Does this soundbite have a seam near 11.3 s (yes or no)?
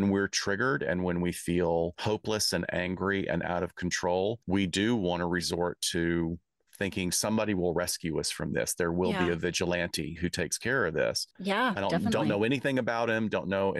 yes